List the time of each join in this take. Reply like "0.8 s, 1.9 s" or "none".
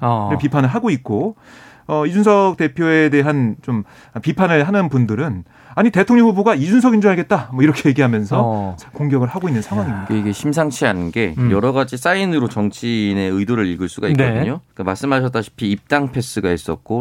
8.8 s, 14.7 s